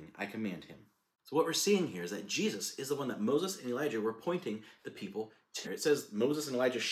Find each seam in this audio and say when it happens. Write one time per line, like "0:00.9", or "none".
0:05.6